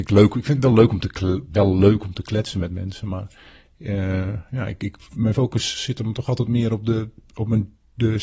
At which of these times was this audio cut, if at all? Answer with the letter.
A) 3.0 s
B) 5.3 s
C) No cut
B